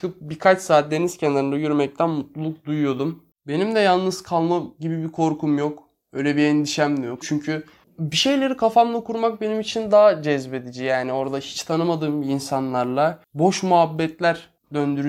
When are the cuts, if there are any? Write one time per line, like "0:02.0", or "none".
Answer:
0:07.2